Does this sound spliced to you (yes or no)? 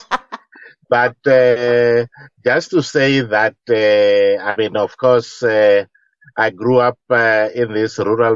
no